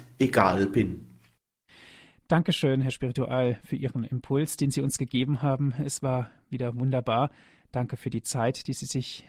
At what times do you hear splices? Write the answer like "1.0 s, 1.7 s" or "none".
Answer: none

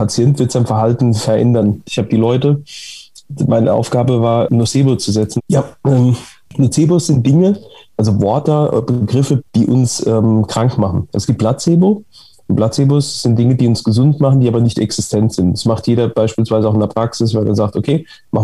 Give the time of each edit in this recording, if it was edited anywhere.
1.8 s, 5.4 s, 9.4 s

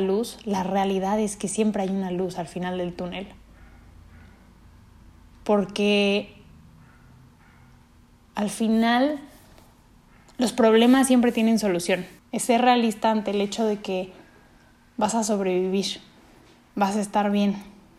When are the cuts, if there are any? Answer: 12.2 s

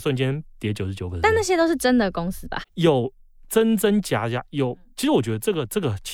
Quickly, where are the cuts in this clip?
2.6 s

